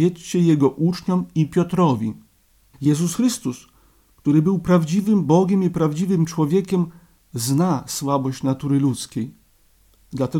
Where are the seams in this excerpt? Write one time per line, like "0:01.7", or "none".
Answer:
0:02.7